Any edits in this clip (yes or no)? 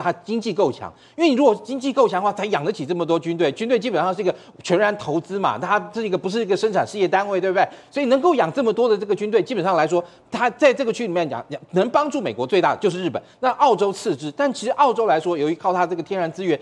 no